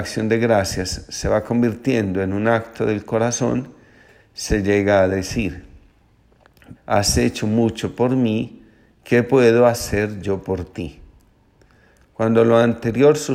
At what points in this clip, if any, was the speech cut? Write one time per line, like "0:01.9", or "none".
0:06.8

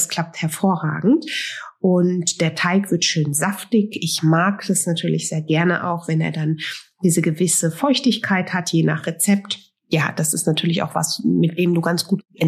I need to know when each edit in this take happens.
none

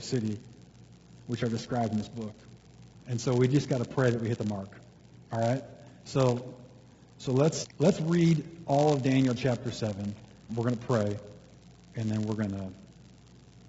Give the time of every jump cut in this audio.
0:02.9
0:07.6
0:10.5

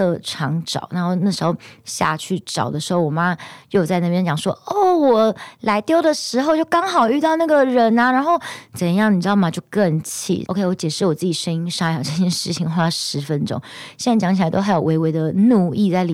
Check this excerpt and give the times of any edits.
0:10.5

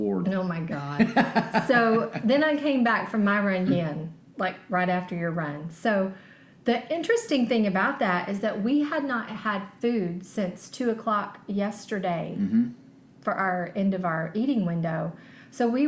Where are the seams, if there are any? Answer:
0:03.7

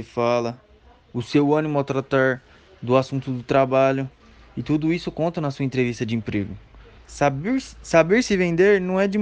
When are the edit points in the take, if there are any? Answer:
0:07.0

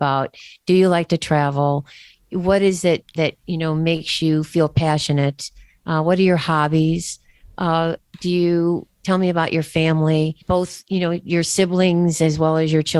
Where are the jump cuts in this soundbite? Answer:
0:10.4

